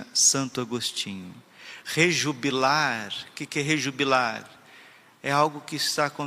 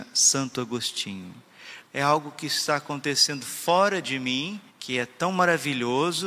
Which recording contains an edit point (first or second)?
second